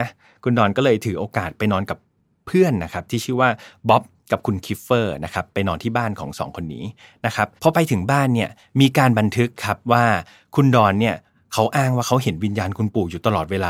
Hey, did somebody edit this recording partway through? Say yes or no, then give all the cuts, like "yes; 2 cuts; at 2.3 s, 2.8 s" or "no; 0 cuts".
yes; 1 cut; at 7.6 s